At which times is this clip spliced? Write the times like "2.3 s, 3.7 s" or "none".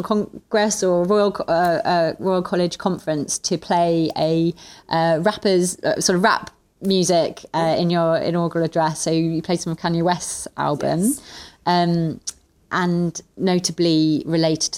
none

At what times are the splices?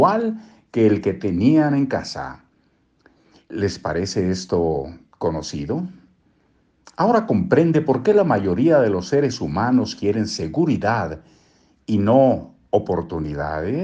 none

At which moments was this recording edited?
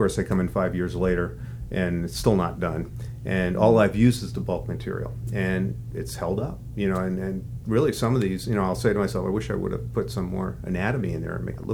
none

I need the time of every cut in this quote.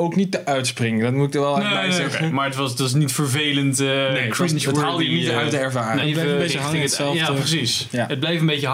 6.0 s

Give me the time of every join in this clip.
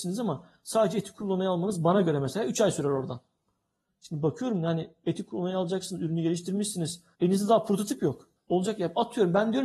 7.1 s, 8.4 s

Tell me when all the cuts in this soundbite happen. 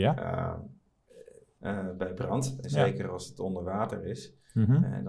1.6 s, 2.6 s

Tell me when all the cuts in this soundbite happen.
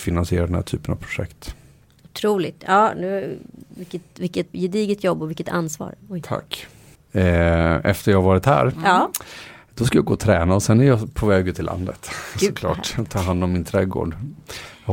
4.5 s, 7.0 s

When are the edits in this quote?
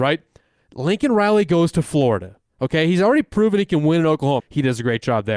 4.4 s

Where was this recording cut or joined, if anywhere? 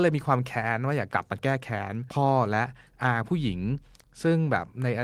1.1 s

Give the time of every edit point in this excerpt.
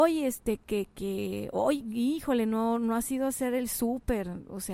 none

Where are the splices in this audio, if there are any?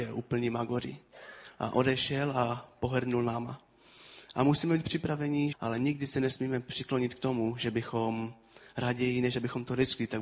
5.5 s

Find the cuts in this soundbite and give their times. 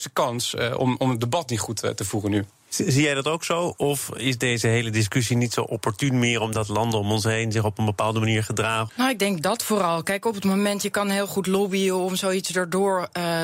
8.9 s

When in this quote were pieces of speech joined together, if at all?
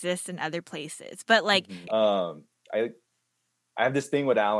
1.9 s

